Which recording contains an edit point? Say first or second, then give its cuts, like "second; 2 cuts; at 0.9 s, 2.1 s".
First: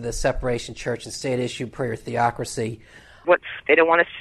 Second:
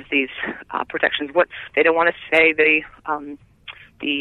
first; 1 cut; at 3.2 s